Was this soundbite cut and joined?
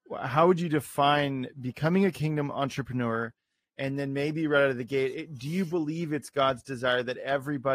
no; 0 cuts

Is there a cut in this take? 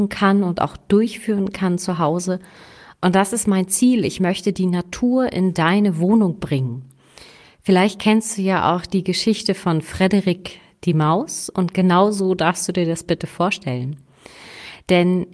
no; 0 cuts

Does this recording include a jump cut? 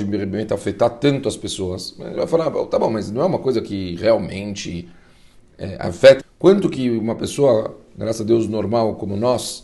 yes; 1 cut; at 6.2 s

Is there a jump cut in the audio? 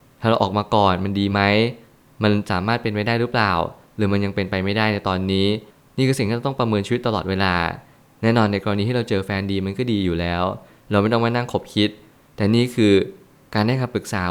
no; 0 cuts

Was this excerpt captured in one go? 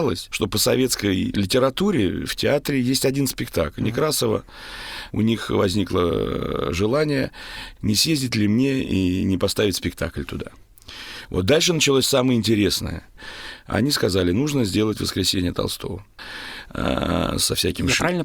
no; 2 cuts; at 3.8 s, 5.1 s

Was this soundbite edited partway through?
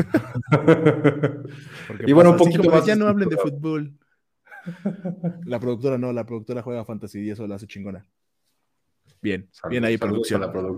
no; 0 cuts

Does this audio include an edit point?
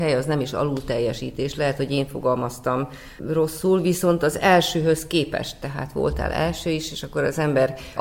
no; 0 cuts

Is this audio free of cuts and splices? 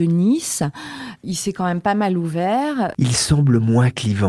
no; 2 cuts; at 1.2 s, 2.9 s

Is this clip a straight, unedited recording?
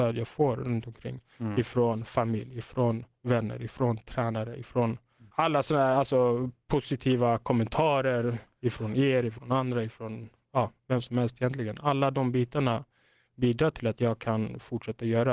yes; 0 cuts

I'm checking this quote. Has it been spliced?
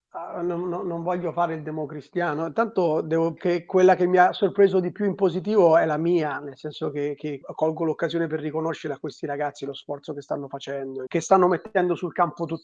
yes; 3 cuts; at 3.4 s, 7.4 s, 11.1 s

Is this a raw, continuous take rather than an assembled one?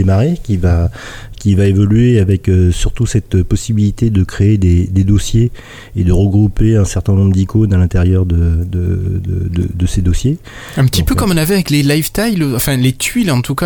yes; 0 cuts

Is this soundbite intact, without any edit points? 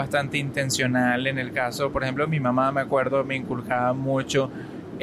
yes; 0 cuts

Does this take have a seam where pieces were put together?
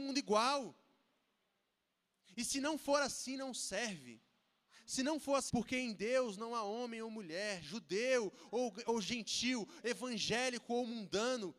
yes; 1 cut; at 5.5 s

